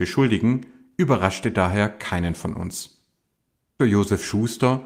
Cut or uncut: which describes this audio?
cut